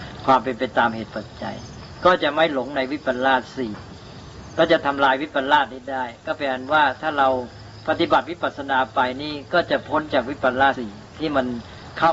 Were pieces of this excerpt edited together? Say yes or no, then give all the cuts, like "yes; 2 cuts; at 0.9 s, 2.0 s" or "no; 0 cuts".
yes; 1 cut; at 10.7 s